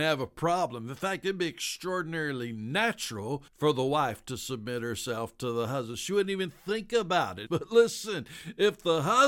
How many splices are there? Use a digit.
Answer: 2